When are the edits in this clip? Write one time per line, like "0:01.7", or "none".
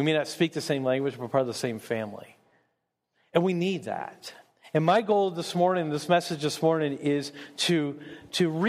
none